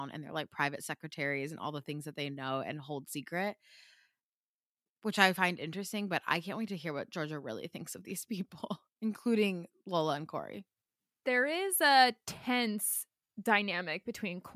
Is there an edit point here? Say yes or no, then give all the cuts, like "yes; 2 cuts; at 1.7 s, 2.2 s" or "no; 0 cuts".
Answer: yes; 1 cut; at 9.0 s